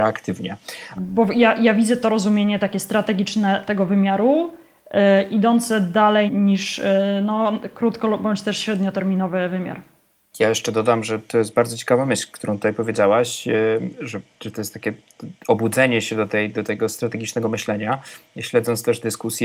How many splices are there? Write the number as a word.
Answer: two